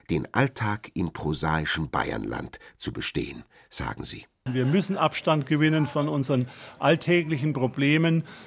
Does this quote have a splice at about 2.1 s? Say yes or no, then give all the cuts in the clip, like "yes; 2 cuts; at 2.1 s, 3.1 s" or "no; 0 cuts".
no; 1 cut; at 4.5 s